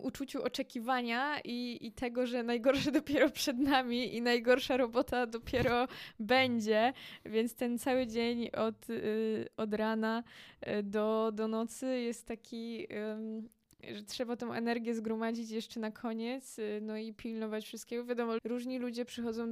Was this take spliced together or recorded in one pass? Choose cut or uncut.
cut